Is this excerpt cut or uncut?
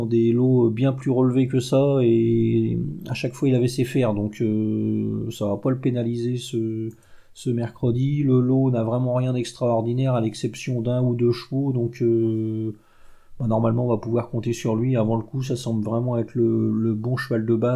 uncut